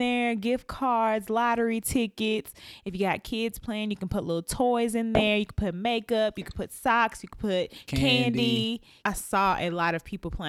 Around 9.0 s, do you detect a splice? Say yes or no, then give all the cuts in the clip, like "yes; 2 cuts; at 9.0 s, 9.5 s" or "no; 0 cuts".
yes; 1 cut; at 9.0 s